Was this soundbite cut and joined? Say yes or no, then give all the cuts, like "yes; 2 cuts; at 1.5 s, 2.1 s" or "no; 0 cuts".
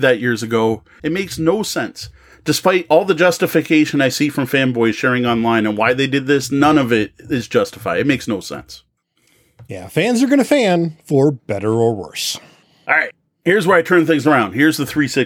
yes; 1 cut; at 1.0 s